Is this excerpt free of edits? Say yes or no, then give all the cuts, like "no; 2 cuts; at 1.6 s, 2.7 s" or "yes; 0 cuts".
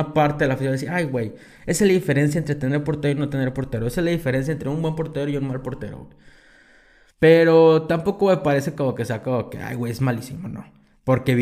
no; 1 cut; at 7.1 s